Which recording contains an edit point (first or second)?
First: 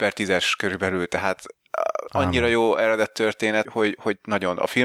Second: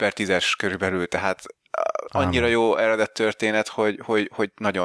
first